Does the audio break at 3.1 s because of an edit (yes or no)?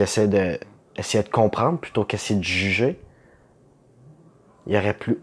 no